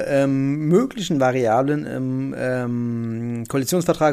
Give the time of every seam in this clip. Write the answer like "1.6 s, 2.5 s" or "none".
none

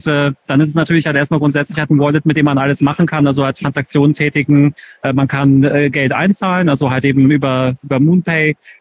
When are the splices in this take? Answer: none

